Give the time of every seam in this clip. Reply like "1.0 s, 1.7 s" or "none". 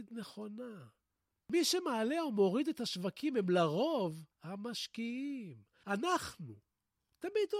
4.3 s